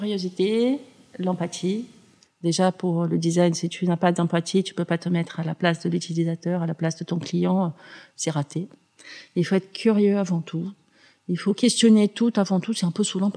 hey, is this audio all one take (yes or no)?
yes